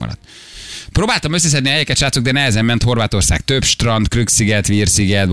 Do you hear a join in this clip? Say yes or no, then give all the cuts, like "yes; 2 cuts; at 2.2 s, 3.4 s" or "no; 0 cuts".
no; 0 cuts